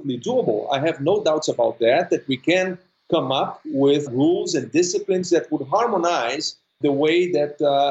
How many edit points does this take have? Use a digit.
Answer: 2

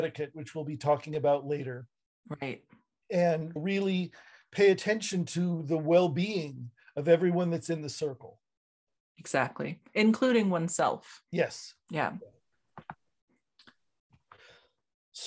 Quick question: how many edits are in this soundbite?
2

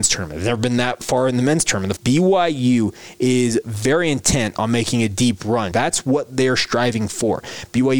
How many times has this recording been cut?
2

